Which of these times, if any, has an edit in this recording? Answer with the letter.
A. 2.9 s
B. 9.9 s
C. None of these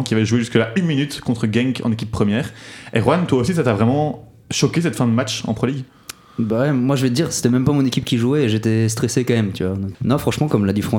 B